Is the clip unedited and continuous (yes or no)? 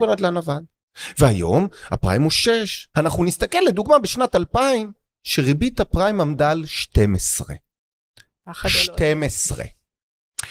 no